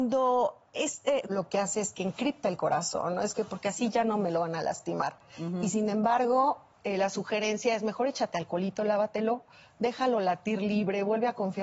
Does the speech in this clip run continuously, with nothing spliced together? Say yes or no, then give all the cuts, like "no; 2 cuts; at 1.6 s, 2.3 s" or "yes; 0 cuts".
no; 1 cut; at 1.3 s